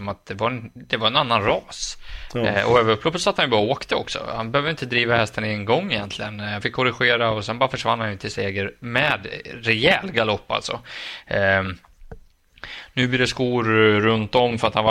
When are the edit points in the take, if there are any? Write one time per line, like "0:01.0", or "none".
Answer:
0:06.6